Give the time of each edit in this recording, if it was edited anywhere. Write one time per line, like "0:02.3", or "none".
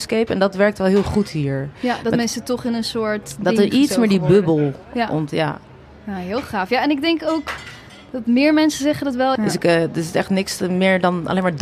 0:05.3
0:09.4

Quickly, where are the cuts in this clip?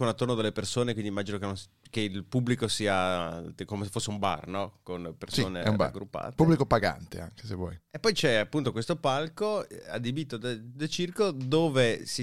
0:07.9

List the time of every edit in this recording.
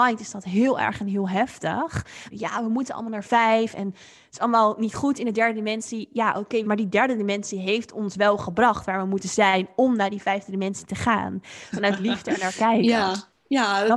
0:02.3
0:06.6
0:11.7

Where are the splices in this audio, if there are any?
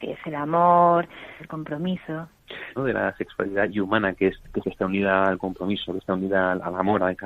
0:01.4
0:02.8
0:04.6

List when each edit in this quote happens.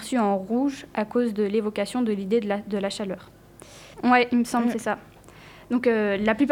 0:03.9

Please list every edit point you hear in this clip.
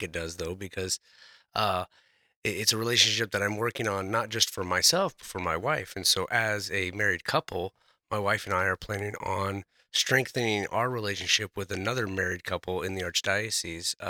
0:05.2

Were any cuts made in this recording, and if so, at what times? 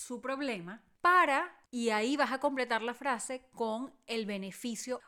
0:01.7

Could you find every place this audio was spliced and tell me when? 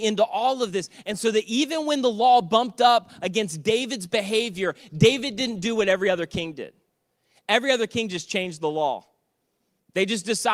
none

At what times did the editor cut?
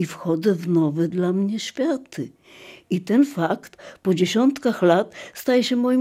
none

